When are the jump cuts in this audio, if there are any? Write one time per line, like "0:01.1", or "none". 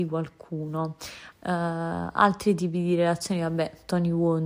0:01.3

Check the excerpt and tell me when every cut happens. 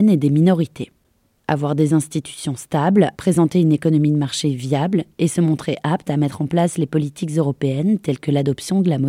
0:01.4
0:03.1

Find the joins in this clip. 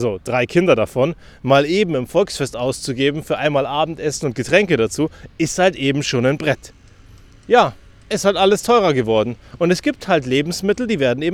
none

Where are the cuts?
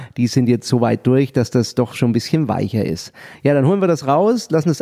none

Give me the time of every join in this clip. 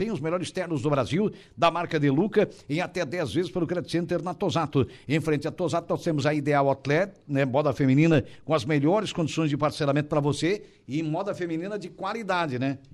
none

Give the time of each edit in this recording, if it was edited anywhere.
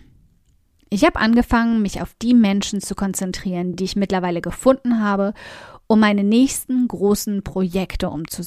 none

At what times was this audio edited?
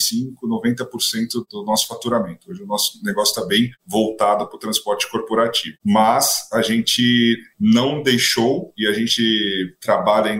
none

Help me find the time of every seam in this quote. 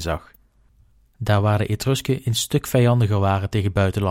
none

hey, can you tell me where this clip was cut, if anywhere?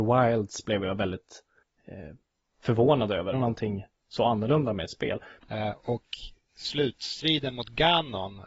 0:03.3
0:05.4

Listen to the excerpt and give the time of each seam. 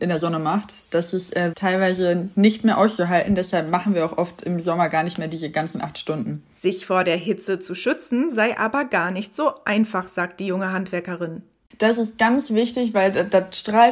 0:01.5
0:11.7

